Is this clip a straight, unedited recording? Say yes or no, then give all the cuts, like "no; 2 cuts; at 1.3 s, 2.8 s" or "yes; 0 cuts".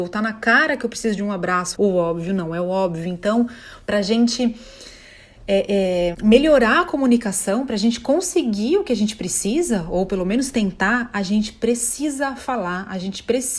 no; 2 cuts; at 1.7 s, 6.1 s